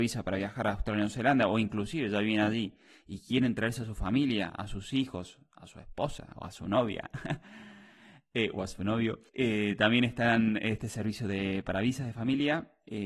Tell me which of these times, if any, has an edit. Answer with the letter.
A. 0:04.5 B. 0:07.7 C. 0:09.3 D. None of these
C